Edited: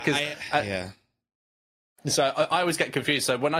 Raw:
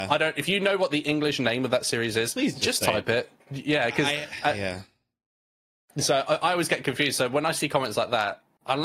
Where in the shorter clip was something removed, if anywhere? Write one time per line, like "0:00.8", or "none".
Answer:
none